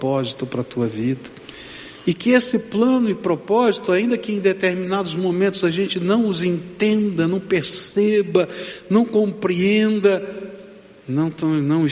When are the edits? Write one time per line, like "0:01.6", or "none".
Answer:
none